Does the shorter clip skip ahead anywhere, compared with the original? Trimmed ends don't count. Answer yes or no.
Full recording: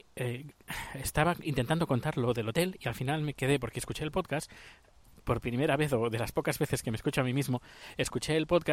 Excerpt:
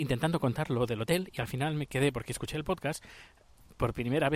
no